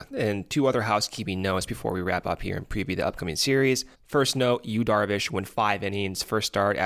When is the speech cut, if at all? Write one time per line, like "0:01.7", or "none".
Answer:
0:03.9